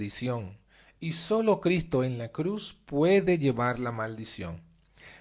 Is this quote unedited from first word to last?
yes; 0 cuts

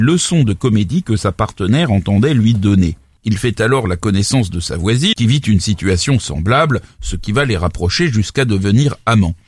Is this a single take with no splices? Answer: no; 2 cuts; at 3.2 s, 5.1 s

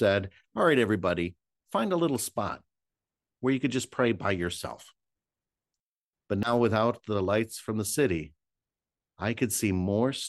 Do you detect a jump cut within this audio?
yes; 1 cut; at 6.1 s

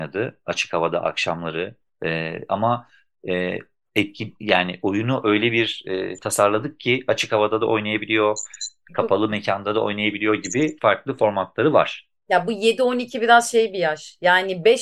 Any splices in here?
yes; 1 cut; at 10.8 s

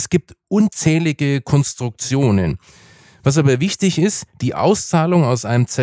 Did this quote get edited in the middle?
no; 0 cuts

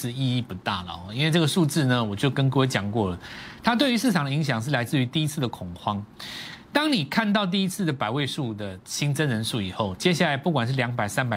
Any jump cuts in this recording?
no; 0 cuts

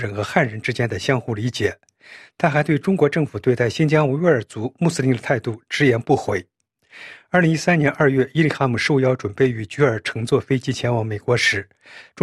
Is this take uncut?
yes; 0 cuts

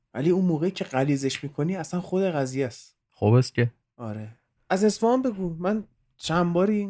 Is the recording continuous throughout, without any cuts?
yes; 0 cuts

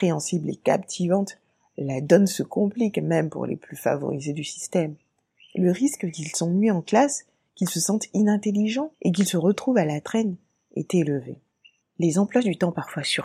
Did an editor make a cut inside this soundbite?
yes; 3 cuts; at 5.3 s, 8.9 s, 11.8 s

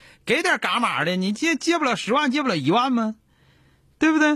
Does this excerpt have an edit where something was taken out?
no; 0 cuts

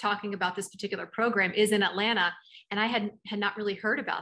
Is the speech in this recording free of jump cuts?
yes; 0 cuts

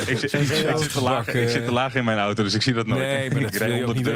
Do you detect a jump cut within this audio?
no; 0 cuts

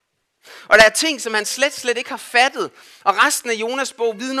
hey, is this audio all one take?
yes; 0 cuts

